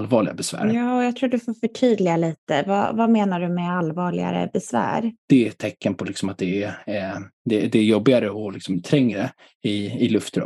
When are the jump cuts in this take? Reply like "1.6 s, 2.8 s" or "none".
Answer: 5.2 s